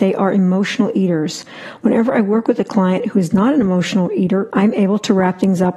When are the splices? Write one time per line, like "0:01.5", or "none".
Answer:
0:04.5